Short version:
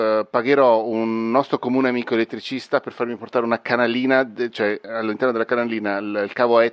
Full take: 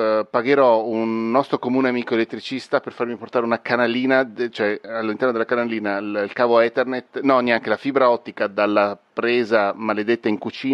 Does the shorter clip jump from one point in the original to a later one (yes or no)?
no